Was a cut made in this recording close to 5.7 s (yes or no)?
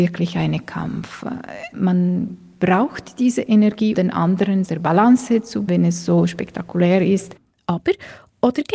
yes